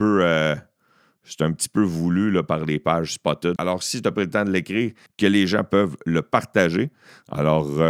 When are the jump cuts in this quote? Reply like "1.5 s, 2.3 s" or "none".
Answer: 3.6 s, 5.1 s